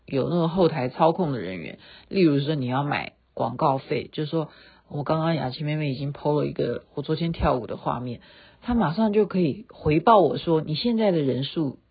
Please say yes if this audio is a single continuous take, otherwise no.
yes